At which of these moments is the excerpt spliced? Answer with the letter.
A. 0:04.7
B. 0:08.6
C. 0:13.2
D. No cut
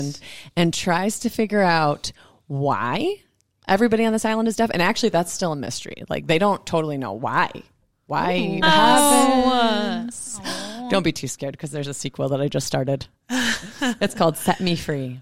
B